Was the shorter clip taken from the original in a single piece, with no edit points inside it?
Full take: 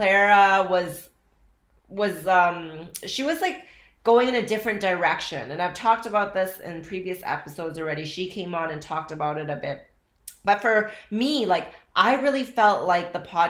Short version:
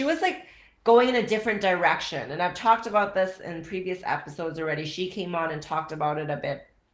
yes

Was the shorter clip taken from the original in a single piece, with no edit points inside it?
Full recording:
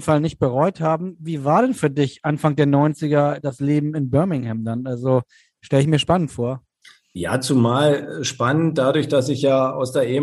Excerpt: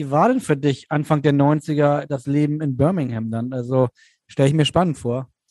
yes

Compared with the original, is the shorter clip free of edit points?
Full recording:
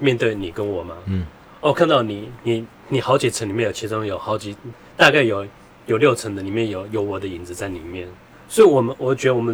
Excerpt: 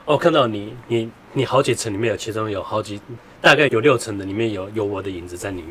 no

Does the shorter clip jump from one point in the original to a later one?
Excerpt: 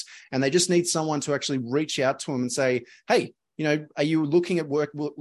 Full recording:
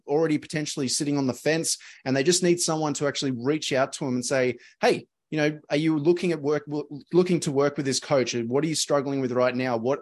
no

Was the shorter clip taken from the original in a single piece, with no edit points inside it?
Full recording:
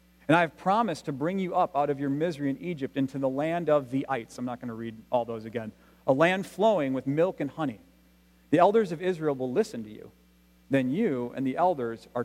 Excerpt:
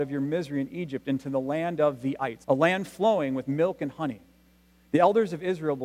no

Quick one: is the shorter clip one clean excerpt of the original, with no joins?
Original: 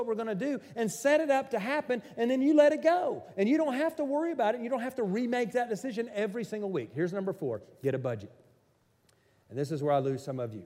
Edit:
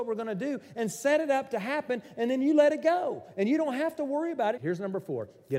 no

